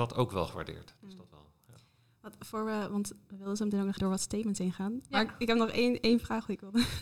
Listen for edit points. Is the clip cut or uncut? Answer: cut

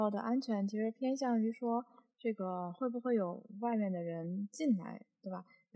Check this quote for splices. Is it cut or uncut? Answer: uncut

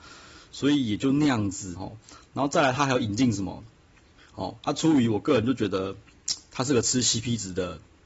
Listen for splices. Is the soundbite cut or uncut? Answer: cut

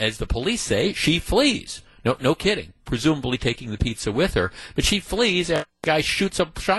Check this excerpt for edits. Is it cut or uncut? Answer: uncut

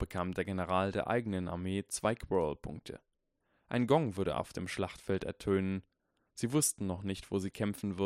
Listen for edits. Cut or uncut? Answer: uncut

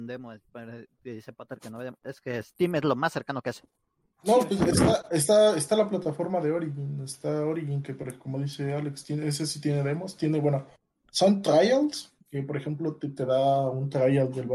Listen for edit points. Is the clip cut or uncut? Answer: uncut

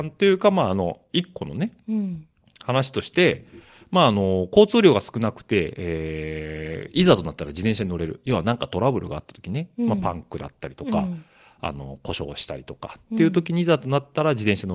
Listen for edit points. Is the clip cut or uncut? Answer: uncut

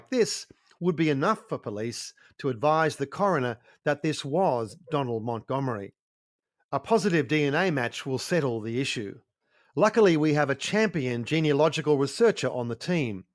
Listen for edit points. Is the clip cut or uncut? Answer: uncut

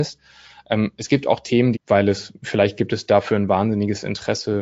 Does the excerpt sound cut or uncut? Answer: cut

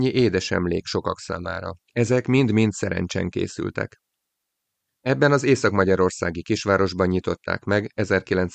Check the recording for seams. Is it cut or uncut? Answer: cut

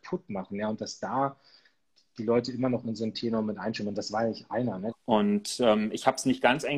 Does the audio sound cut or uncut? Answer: cut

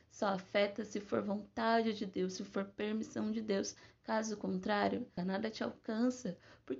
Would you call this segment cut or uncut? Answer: cut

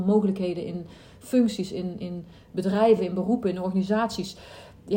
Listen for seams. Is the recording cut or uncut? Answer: uncut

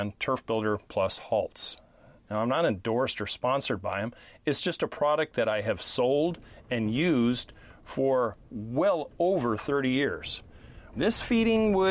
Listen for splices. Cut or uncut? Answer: cut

